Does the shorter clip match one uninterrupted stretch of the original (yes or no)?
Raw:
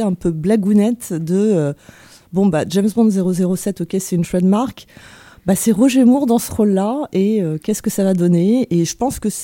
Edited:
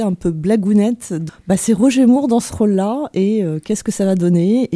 no